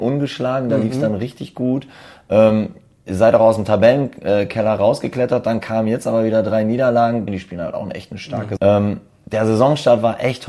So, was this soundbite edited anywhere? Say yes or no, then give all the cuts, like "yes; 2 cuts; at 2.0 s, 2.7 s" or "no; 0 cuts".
yes; 2 cuts; at 7.3 s, 8.6 s